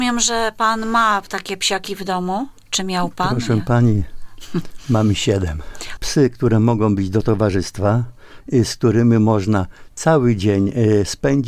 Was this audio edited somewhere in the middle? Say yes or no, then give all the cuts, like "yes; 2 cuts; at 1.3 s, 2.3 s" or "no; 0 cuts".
yes; 2 cuts; at 6.0 s, 8.4 s